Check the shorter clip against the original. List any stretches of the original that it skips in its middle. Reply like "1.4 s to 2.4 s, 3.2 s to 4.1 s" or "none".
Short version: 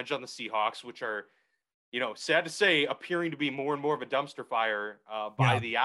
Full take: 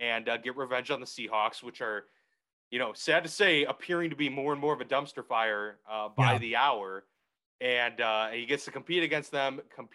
none